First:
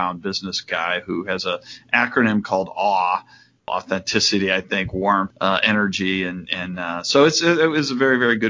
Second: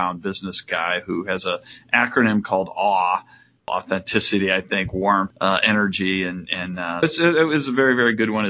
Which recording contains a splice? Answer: second; 1 cut; at 7.0 s

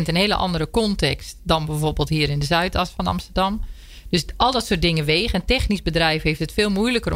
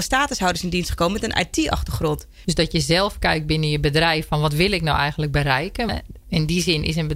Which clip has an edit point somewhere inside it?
second; 2 cuts; at 2.4 s, 5.9 s

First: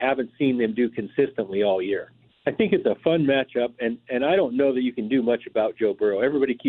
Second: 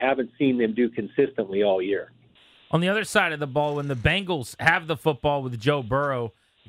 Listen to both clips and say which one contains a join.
first; 1 cut; at 2.3 s

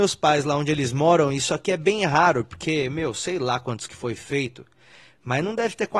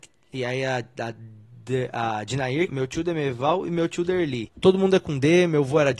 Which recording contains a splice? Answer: second; 2 cuts; at 2.7 s, 4.5 s

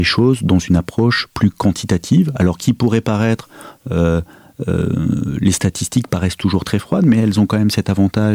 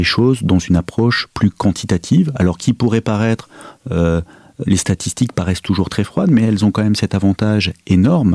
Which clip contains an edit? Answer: second; 1 cut; at 4.6 s

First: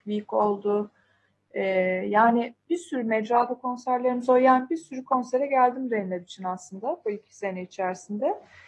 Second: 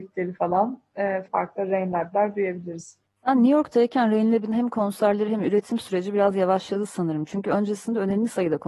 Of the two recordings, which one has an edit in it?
second; 1 cut; at 1.3 s

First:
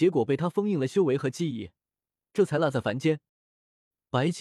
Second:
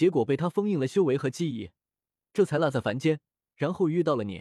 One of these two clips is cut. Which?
first; 1 cut; at 3.3 s

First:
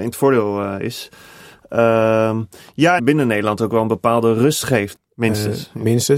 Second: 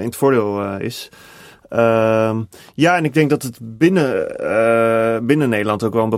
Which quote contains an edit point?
first; 2 cuts; at 3.0 s, 4.9 s

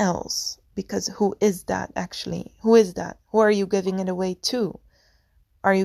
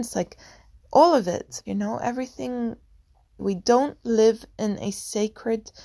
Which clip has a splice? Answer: second; 2 cuts; at 1.7 s, 3.4 s

